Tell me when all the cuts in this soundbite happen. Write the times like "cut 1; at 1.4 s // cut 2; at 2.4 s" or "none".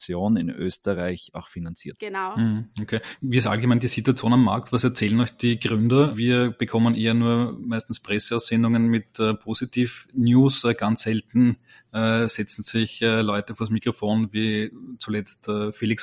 none